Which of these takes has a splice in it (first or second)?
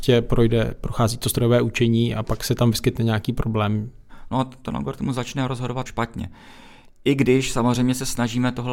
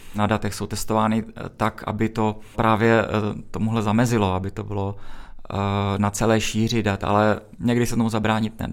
first